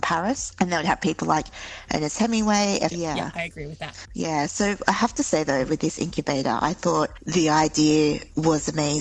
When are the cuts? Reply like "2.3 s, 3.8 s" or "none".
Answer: 2.9 s